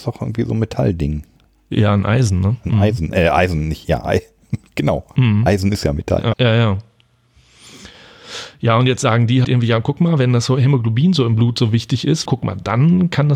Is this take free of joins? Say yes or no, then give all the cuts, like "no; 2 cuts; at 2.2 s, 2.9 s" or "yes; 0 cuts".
no; 3 cuts; at 6.3 s, 9.4 s, 12.3 s